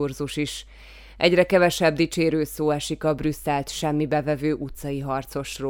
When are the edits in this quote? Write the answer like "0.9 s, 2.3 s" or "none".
none